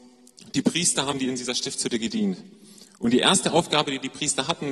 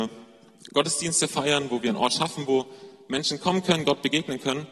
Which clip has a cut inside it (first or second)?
first